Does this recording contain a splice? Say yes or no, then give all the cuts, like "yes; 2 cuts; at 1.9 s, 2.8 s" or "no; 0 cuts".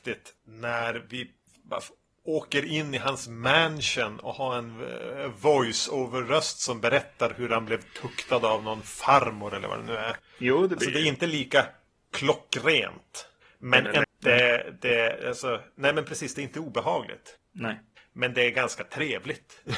yes; 2 cuts; at 10.2 s, 14.0 s